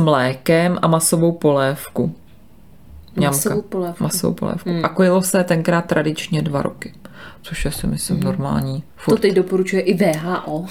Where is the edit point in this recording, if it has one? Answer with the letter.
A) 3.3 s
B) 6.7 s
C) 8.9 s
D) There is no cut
C